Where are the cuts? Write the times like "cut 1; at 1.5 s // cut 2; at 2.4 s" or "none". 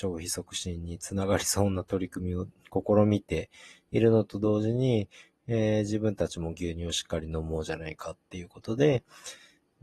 none